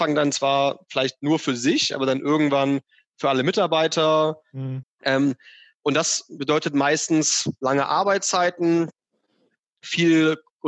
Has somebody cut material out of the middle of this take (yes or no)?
yes